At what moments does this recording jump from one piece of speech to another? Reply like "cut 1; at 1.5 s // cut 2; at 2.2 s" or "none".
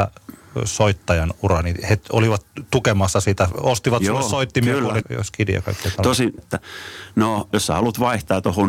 cut 1; at 5.0 s // cut 2; at 6.4 s // cut 3; at 7.5 s